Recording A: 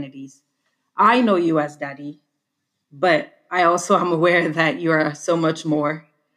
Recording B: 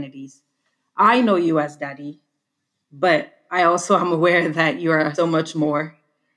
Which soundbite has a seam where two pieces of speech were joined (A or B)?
B